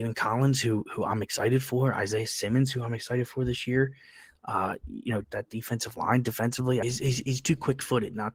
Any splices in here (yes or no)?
yes